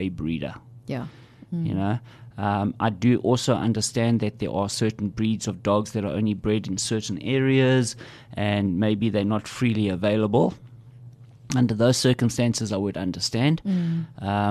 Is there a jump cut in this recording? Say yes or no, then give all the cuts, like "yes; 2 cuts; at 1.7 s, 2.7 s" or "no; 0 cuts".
no; 0 cuts